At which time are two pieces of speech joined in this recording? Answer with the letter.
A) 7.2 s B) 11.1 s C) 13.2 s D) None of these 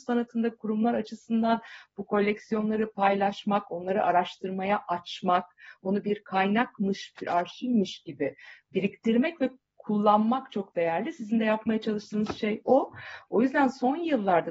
A